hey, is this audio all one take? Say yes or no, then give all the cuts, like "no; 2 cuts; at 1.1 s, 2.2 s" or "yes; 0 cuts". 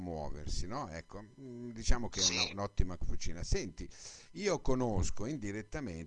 yes; 0 cuts